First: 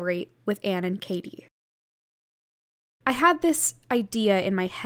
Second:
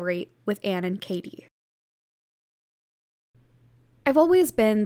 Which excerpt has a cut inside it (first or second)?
first